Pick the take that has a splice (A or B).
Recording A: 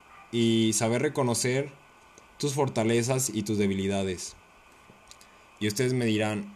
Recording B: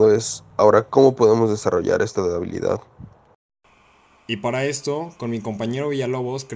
A